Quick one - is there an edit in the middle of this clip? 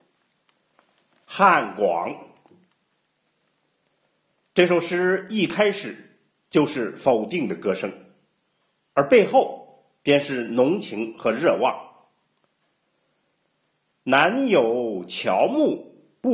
no; 0 cuts

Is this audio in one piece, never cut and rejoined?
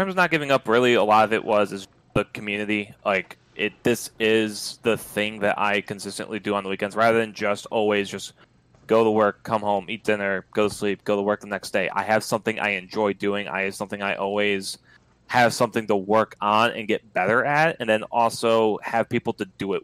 no; 1 cut; at 11.9 s

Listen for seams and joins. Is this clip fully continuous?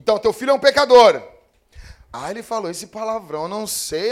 no; 1 cut; at 2.1 s

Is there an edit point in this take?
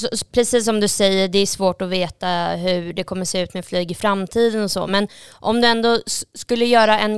no; 0 cuts

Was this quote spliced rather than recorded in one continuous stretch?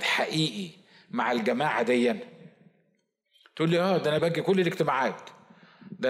yes; 1 cut; at 4.2 s

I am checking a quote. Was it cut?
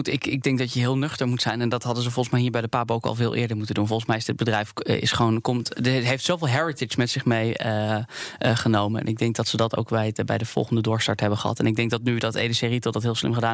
no; 0 cuts

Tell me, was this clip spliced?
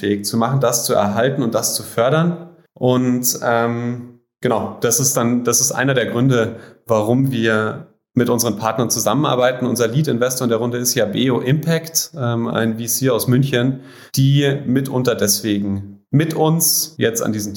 no; 0 cuts

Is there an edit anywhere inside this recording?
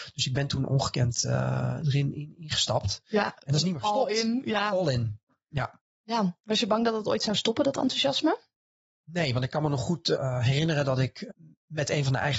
yes; 1 cut; at 2.4 s

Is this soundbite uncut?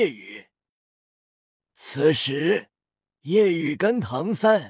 yes; 0 cuts

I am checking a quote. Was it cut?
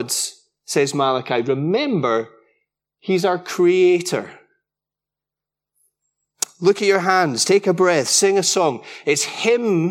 no; 0 cuts

